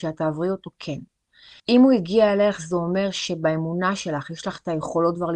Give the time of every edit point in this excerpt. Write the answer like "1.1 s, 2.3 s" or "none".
1.6 s